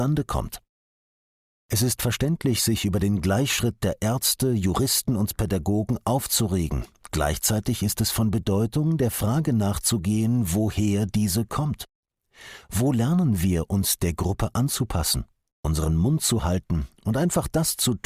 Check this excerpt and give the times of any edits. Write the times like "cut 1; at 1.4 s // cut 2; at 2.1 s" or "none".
none